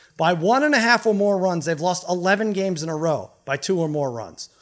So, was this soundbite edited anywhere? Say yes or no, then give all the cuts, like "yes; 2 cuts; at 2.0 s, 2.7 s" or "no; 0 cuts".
no; 0 cuts